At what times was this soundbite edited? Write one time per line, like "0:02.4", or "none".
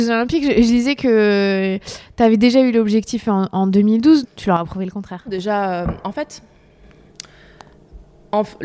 0:04.2
0:05.3